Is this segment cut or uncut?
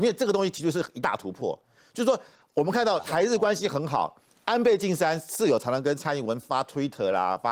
uncut